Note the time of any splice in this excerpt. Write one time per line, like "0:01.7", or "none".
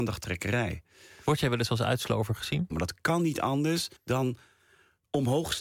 0:02.7
0:04.0